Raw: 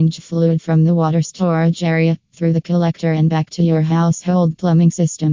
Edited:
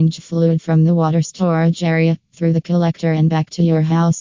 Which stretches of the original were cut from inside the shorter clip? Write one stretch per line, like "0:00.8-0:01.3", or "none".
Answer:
none